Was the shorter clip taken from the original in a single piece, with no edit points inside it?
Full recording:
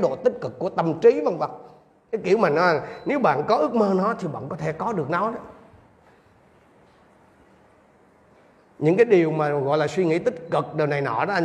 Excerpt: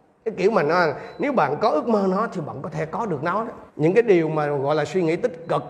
no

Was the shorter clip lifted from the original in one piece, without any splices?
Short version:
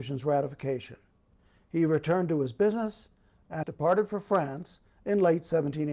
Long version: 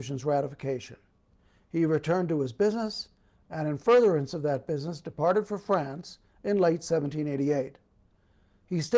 no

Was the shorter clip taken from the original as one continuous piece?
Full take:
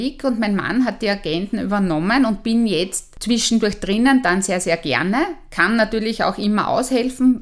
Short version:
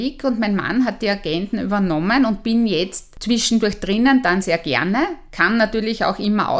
no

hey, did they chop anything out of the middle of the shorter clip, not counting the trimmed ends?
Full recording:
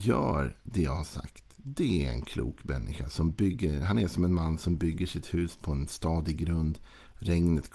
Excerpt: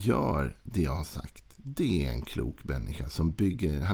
no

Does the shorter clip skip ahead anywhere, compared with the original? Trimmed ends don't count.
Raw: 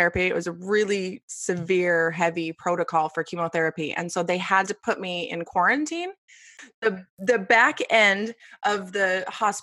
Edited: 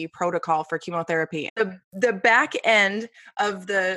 yes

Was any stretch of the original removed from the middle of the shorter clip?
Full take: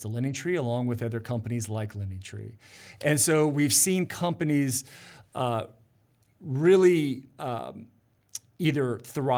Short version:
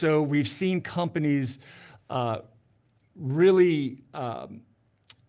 no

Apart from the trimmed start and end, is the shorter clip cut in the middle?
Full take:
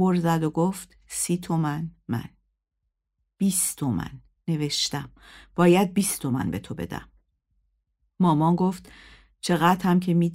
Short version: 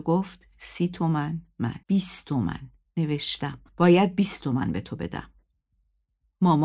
yes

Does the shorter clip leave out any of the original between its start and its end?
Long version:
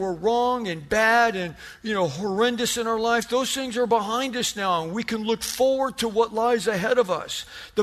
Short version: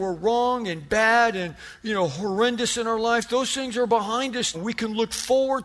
yes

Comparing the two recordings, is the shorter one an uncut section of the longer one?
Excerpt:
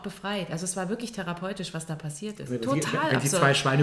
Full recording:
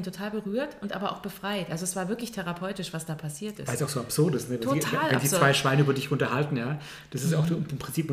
no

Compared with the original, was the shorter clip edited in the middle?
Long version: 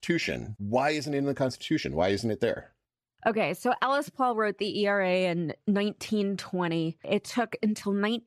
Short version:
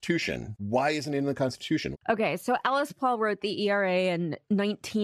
yes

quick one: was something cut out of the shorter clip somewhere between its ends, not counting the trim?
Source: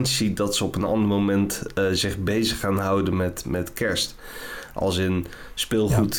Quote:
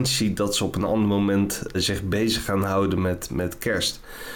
yes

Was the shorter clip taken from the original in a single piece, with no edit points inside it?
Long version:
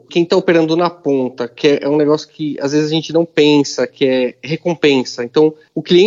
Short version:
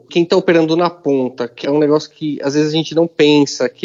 no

